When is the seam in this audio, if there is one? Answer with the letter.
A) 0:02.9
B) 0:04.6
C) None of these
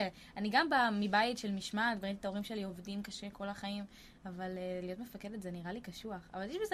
C